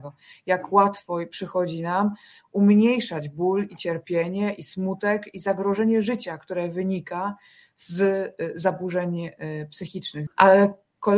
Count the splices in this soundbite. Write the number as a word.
one